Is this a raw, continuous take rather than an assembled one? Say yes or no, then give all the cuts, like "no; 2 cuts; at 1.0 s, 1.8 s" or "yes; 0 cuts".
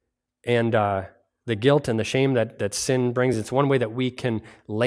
yes; 0 cuts